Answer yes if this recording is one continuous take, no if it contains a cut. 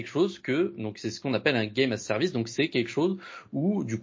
yes